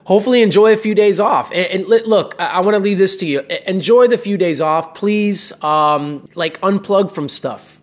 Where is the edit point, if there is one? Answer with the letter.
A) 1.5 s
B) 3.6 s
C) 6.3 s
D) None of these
C